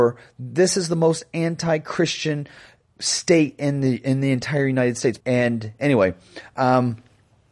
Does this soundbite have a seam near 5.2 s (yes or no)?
yes